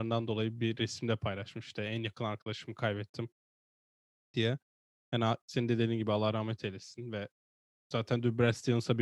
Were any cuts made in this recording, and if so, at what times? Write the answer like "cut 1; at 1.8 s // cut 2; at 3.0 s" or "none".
none

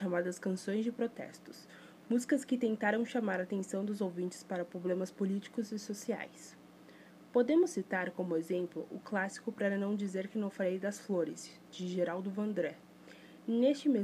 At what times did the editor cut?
none

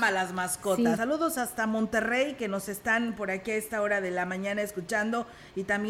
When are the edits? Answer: cut 1; at 1.0 s

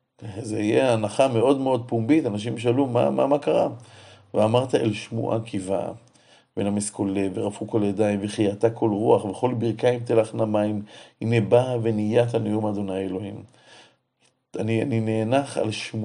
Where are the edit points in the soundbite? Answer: none

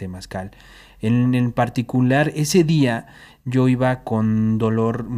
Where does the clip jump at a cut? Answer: none

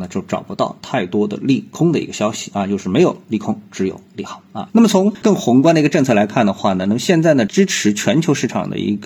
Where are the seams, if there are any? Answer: cut 1; at 4.7 s

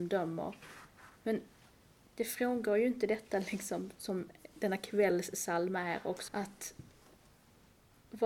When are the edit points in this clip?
cut 1; at 3.9 s // cut 2; at 6.3 s

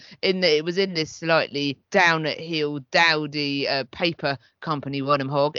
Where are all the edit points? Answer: cut 1; at 1.8 s

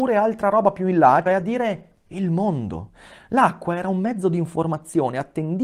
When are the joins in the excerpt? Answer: cut 1; at 1.3 s

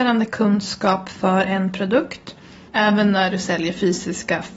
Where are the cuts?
cut 1; at 2.7 s

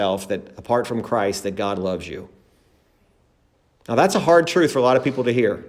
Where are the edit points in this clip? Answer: none

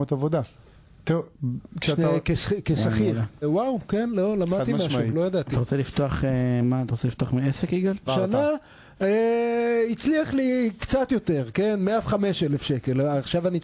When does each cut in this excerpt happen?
cut 1; at 3.4 s // cut 2; at 6.6 s // cut 3; at 8.1 s

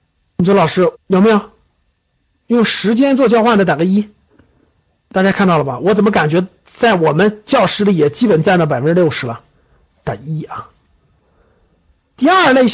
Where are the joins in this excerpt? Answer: cut 1; at 0.9 s

